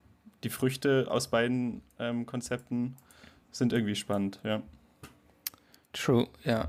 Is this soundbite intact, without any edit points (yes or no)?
yes